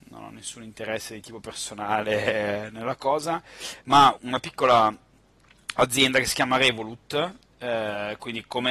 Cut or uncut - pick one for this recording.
cut